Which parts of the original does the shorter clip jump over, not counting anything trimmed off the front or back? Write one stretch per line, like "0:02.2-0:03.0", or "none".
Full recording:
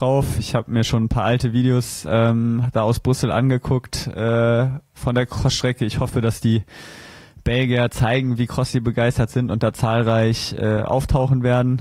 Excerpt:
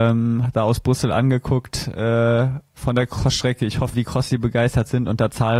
0:06.1-0:08.4

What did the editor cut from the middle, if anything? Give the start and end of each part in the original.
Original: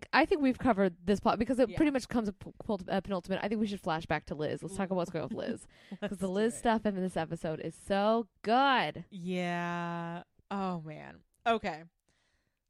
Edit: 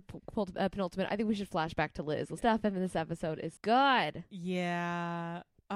0:04.7-0:06.6
0:07.8-0:08.4

